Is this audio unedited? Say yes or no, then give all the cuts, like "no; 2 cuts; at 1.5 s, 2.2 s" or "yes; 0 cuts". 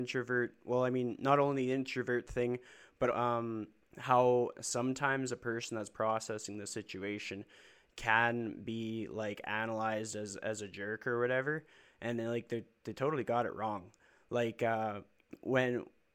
no; 1 cut; at 3.1 s